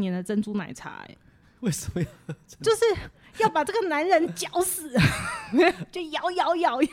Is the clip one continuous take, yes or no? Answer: yes